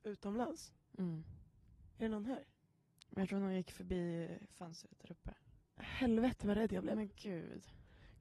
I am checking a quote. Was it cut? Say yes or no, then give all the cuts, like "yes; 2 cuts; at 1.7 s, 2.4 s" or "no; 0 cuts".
no; 0 cuts